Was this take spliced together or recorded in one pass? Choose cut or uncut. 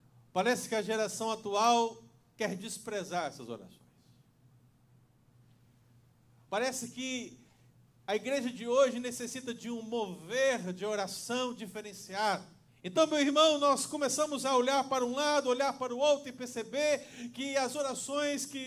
cut